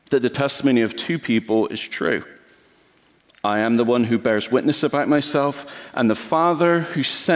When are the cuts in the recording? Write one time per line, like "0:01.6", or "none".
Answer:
none

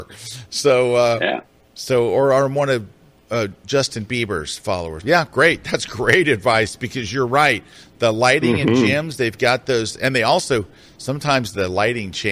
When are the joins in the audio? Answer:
0:05.0

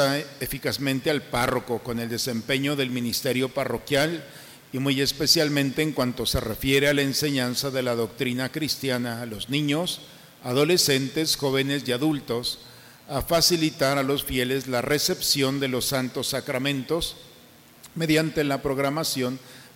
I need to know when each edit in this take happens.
none

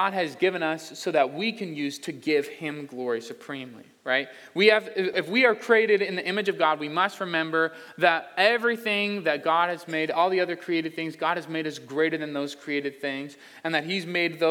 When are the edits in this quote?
0:05.1

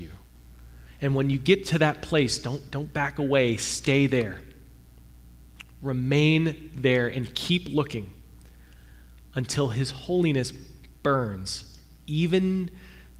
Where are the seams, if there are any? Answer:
none

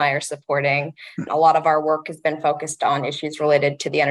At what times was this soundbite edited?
0:01.3

